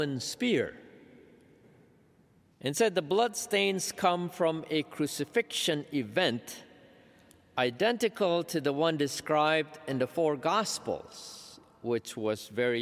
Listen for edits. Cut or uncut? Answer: cut